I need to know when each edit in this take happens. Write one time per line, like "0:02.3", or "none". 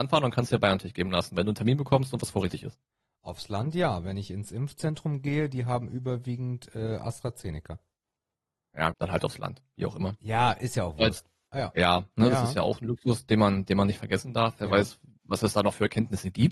0:08.9
0:12.1